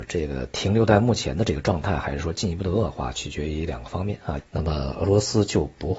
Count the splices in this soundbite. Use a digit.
1